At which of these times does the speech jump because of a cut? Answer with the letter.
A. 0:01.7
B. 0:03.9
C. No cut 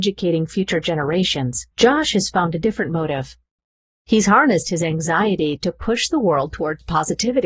A